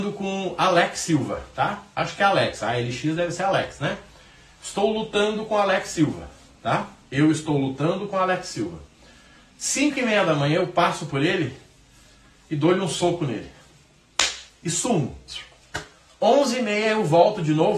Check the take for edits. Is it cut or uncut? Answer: cut